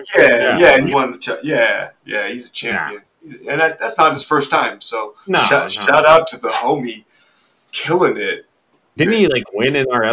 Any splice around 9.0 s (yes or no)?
yes